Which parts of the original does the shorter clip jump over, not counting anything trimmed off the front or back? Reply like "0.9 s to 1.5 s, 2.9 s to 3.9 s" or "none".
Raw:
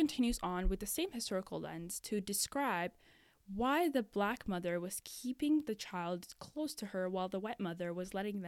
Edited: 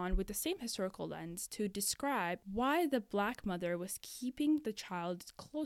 3.0 s to 3.5 s